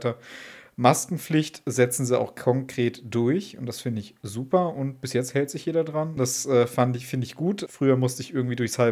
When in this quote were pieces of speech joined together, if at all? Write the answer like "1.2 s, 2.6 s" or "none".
6.2 s, 7.7 s